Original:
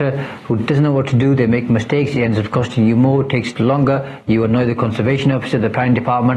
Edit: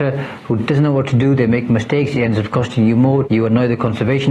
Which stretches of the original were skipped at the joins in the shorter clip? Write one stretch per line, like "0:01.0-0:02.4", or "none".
0:03.2-0:04.2